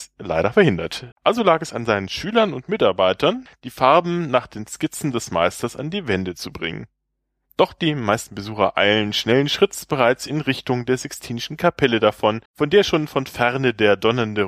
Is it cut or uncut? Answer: cut